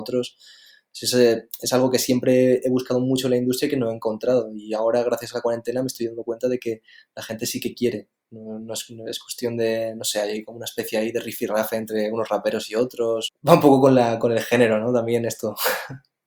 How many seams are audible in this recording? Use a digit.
1